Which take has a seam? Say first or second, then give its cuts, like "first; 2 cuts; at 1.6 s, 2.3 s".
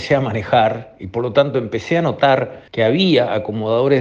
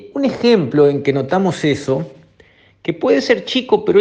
first; 1 cut; at 2.7 s